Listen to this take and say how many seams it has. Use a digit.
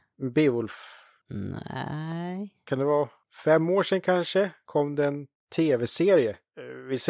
0